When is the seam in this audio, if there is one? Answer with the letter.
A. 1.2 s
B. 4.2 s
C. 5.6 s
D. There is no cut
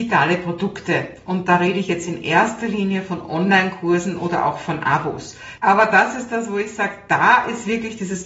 C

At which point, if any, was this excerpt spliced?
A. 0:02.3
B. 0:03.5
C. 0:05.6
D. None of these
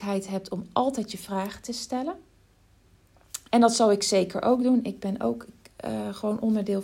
B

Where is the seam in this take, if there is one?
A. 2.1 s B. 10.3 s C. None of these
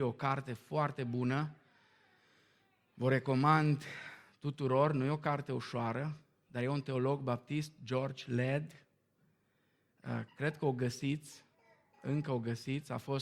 B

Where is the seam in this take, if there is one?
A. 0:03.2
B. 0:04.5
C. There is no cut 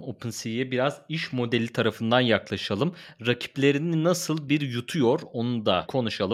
B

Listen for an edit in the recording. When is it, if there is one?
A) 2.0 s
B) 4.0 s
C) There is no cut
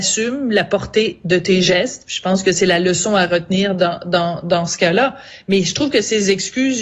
C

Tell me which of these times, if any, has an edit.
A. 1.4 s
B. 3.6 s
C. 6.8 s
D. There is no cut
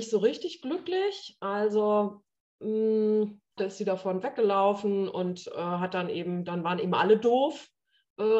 B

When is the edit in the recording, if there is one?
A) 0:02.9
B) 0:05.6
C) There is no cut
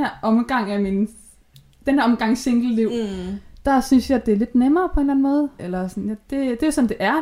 B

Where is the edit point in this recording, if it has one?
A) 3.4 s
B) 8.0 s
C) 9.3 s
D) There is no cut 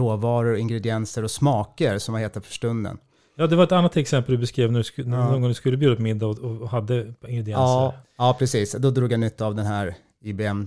B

